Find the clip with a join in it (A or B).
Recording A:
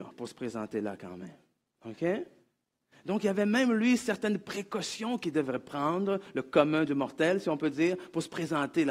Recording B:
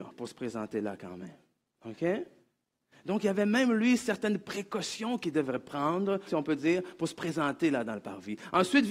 B